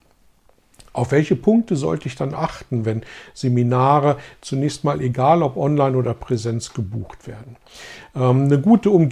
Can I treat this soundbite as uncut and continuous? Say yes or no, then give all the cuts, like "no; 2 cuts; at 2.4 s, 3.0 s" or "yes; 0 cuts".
no; 1 cut; at 2.3 s